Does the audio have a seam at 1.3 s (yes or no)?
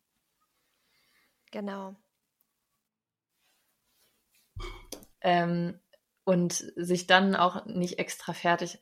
no